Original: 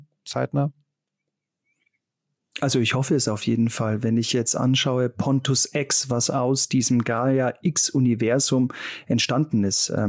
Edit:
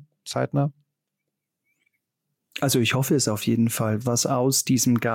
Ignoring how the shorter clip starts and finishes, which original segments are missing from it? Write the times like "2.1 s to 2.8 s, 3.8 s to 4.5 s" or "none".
4.0 s to 6.0 s